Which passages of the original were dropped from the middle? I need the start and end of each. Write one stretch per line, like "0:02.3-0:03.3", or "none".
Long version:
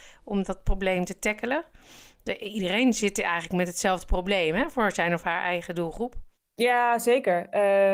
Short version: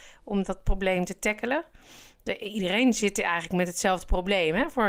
none